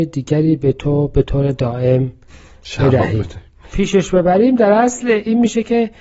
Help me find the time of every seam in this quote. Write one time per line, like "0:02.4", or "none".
0:03.7